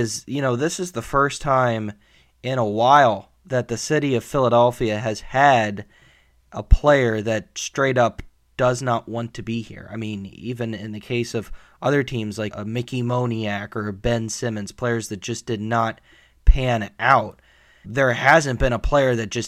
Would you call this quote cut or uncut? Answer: cut